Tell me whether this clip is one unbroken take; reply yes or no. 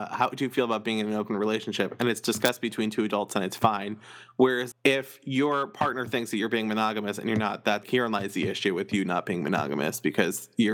no